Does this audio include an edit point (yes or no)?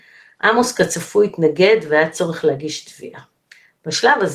no